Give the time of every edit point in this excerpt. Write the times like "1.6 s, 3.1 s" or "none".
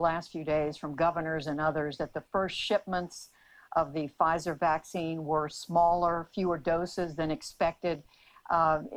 none